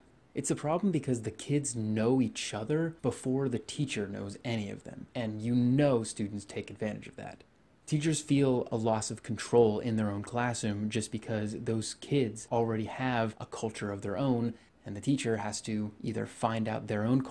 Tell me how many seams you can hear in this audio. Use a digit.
1